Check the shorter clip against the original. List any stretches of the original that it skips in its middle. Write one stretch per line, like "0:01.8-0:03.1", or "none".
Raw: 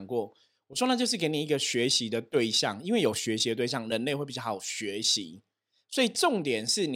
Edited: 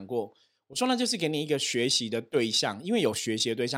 none

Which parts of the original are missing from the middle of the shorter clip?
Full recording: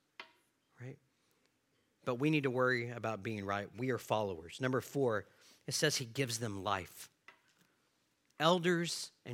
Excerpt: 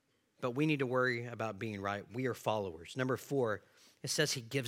none

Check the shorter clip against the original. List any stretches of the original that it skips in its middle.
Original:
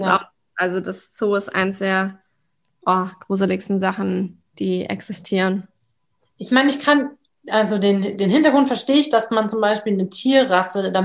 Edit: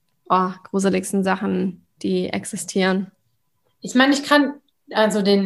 none

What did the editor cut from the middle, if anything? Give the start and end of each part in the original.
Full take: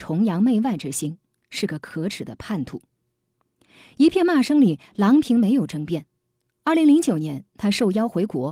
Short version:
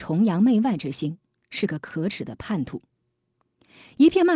none

